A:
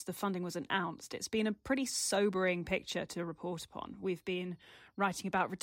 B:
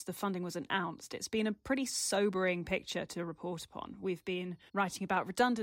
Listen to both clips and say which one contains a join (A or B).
B